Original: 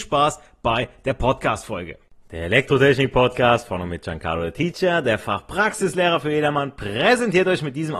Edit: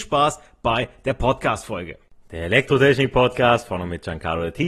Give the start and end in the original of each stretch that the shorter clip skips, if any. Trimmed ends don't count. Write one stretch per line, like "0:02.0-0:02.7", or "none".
none